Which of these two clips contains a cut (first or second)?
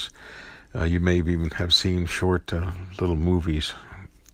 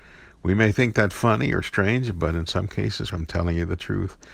second